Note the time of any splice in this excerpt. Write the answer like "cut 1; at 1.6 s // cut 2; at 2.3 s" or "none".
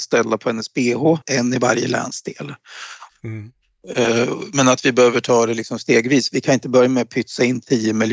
cut 1; at 1.2 s // cut 2; at 3.1 s

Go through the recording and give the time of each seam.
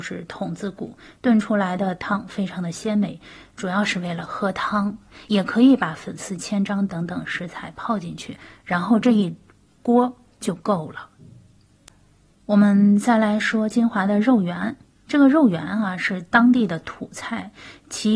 none

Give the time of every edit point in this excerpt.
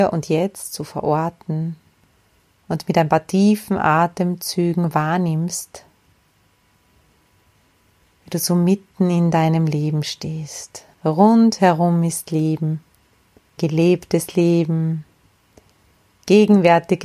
cut 1; at 10.9 s // cut 2; at 13.6 s

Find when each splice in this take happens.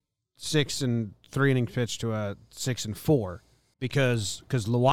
cut 1; at 3.7 s

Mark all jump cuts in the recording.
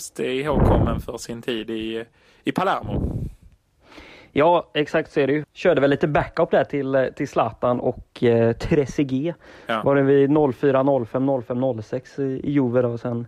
cut 1; at 5.4 s

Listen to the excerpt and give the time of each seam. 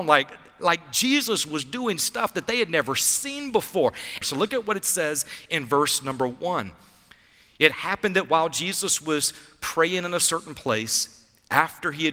cut 1; at 4.2 s

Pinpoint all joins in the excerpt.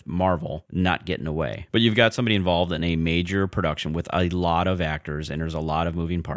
cut 1; at 1.7 s

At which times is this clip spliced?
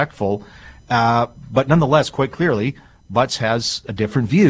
none

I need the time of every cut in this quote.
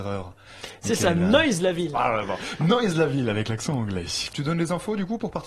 cut 1; at 1.9 s // cut 2; at 4.3 s

